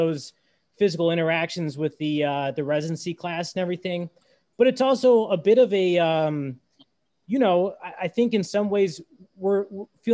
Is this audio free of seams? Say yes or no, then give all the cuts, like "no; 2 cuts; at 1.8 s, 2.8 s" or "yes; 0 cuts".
yes; 0 cuts